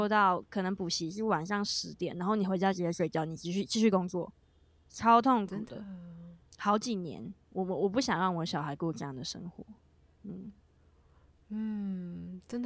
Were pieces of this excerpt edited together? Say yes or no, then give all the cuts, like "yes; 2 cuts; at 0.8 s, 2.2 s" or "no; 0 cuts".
no; 0 cuts